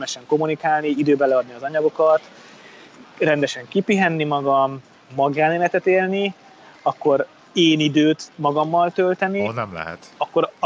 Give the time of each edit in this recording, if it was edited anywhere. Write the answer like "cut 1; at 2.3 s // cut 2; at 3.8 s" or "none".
none